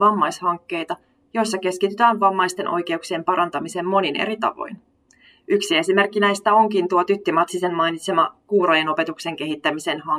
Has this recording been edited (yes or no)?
no